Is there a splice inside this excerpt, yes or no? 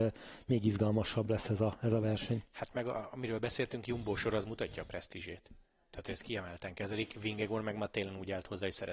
no